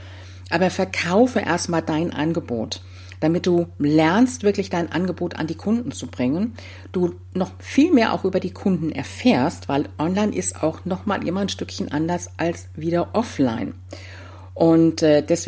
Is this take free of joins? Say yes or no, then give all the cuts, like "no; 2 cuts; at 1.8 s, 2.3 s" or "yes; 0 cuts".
yes; 0 cuts